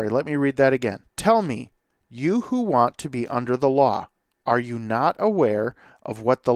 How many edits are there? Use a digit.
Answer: 1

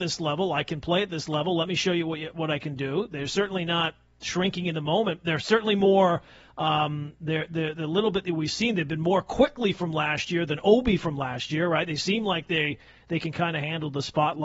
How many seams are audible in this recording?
0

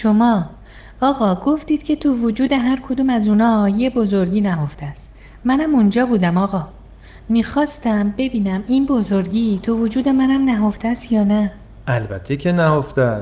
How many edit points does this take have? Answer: 0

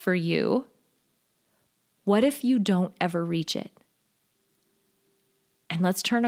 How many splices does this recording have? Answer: 0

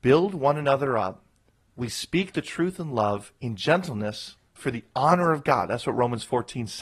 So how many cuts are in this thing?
0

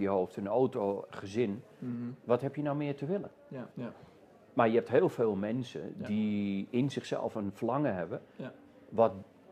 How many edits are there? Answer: 1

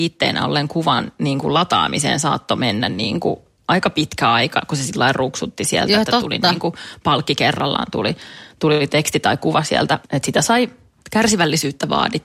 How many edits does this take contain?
0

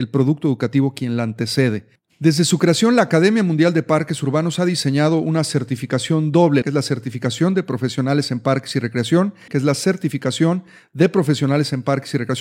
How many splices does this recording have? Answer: 2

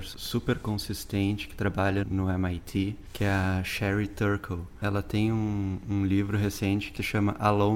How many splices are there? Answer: 1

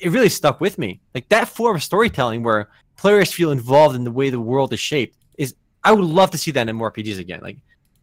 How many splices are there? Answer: 1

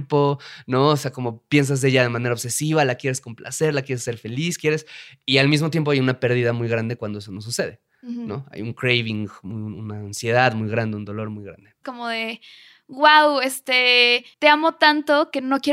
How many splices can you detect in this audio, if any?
2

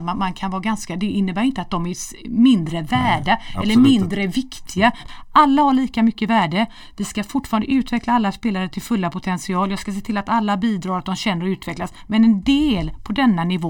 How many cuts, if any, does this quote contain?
1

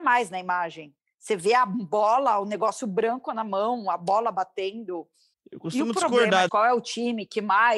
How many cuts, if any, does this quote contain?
2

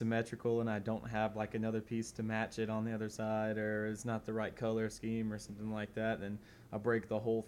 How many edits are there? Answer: 0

